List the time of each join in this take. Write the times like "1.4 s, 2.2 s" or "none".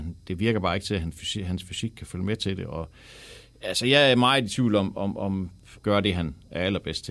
5.8 s